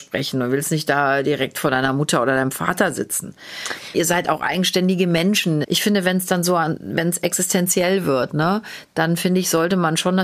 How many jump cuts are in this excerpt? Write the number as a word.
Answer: two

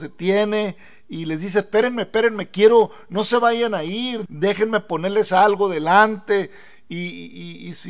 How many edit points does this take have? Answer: one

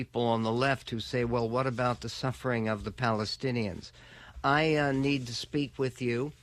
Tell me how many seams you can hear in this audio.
zero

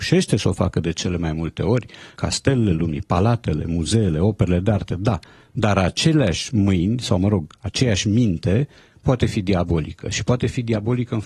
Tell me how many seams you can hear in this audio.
one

